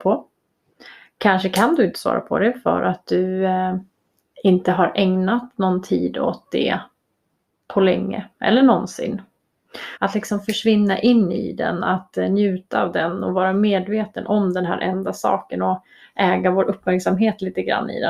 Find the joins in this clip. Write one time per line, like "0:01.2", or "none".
0:10.0